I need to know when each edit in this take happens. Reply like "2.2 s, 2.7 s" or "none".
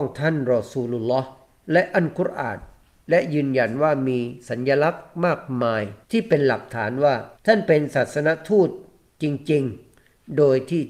6.0 s, 7.4 s